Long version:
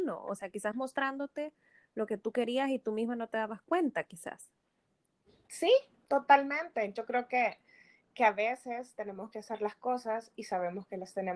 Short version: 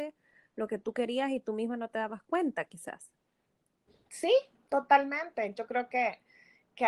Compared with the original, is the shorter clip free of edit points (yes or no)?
yes